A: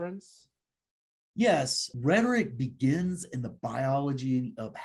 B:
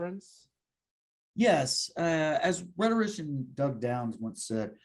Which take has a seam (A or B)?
A